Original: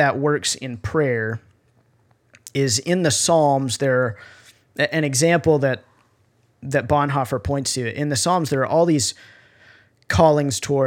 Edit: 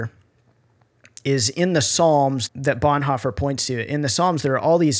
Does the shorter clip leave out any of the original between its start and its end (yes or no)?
yes